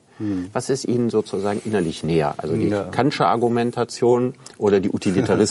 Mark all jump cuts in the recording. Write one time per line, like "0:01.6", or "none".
none